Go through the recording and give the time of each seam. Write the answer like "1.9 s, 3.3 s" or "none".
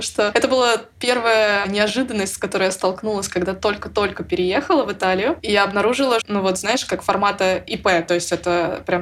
6.2 s